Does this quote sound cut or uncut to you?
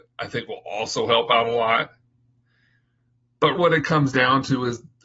cut